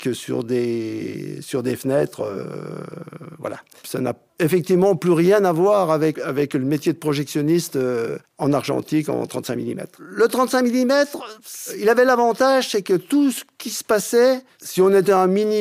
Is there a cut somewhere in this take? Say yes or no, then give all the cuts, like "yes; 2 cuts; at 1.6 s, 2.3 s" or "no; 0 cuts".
yes; 1 cut; at 6.2 s